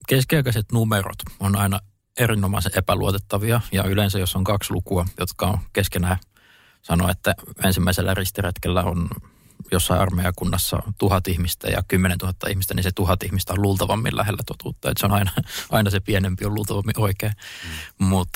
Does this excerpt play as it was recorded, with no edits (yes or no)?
yes